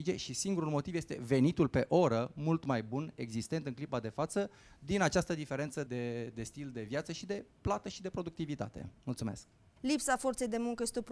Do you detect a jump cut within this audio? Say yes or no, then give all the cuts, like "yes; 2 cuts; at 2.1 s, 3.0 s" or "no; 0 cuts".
yes; 2 cuts; at 5.9 s, 9.8 s